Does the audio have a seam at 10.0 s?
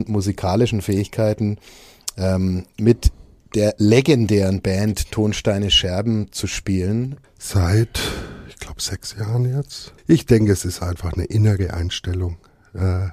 yes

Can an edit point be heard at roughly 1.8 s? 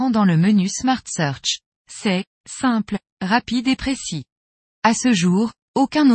yes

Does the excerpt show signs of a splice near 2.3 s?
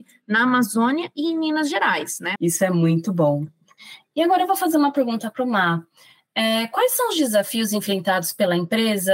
yes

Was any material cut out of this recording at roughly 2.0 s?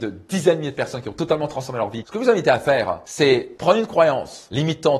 yes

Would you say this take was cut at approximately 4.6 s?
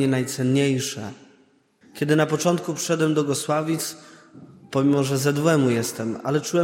no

